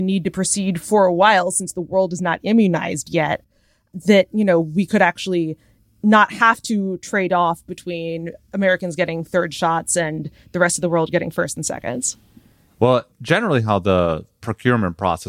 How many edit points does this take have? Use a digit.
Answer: 0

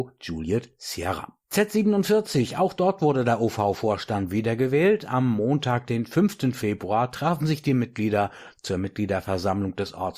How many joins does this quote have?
1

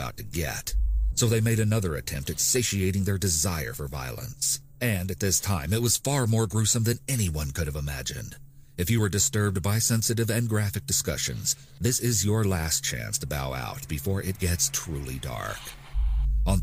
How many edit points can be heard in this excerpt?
1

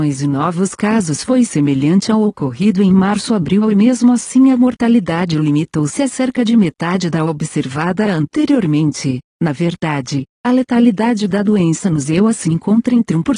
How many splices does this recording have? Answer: 0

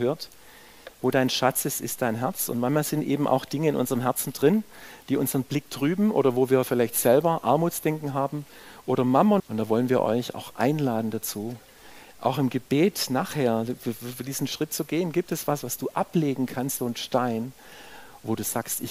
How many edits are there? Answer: 3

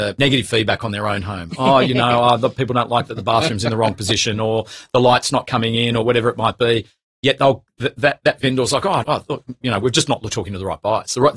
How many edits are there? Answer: 1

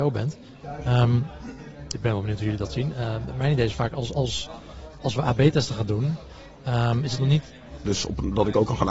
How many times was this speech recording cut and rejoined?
2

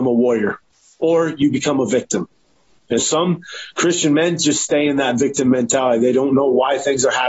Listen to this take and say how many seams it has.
1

